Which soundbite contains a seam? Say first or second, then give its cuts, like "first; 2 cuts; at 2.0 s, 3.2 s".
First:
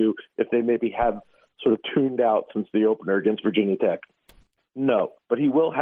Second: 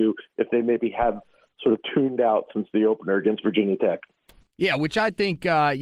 first; 1 cut; at 4.6 s